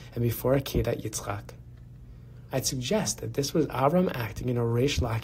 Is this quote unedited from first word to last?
no; 1 cut; at 2.5 s

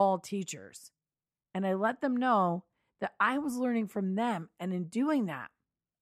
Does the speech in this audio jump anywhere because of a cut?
no; 0 cuts

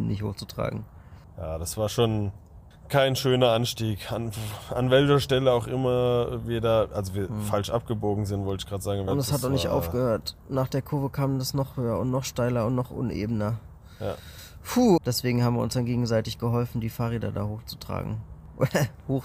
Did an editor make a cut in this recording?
yes; 2 cuts; at 9.1 s, 15.0 s

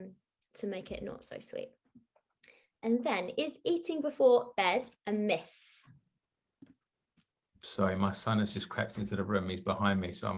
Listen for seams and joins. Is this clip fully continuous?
yes; 0 cuts

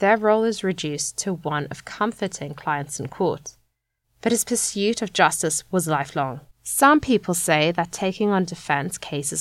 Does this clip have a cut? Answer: yes; 2 cuts; at 4.0 s, 6.5 s

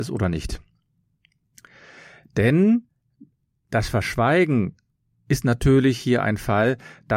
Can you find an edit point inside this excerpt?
no; 0 cuts

